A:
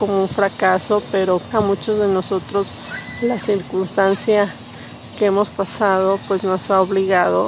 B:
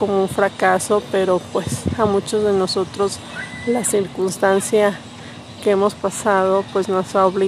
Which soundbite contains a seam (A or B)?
A